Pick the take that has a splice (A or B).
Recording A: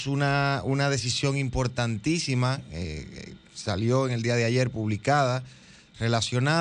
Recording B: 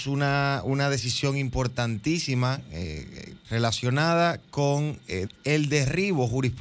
B